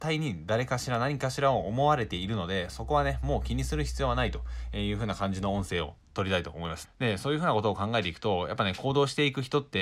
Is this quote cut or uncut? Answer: cut